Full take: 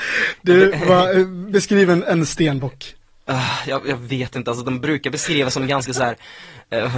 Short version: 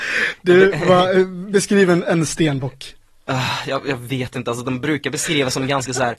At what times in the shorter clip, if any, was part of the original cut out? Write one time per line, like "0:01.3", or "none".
none